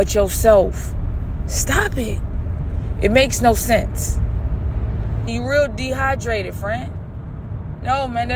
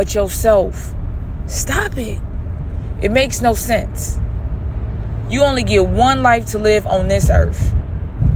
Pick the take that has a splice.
first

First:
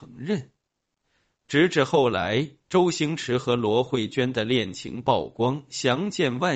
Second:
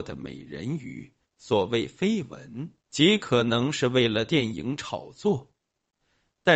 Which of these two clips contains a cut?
second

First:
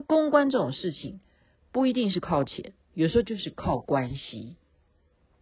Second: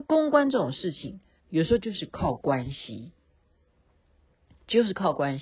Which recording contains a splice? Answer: second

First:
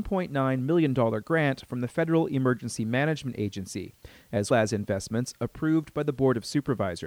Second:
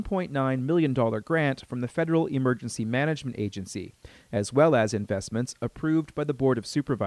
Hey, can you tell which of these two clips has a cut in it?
first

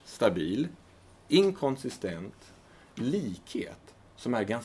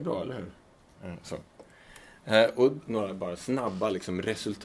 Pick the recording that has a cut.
second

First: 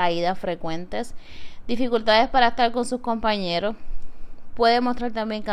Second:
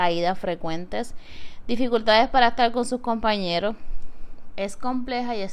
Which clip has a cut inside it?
second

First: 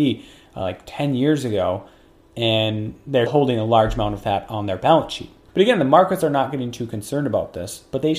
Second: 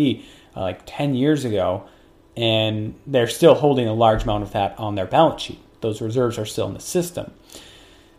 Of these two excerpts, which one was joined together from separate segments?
first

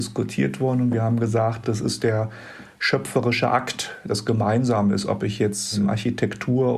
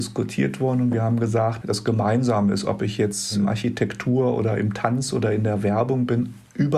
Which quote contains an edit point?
second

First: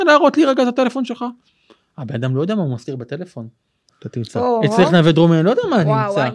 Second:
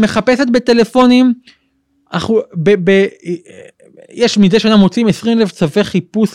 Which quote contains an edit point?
first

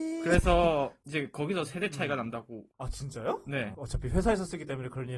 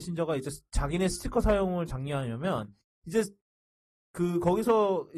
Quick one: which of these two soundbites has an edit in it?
first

